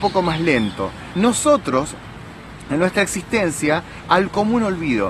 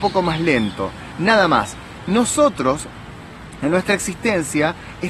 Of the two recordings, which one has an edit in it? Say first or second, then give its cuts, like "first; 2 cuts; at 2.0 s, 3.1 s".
first; 2 cuts; at 1.1 s, 4.0 s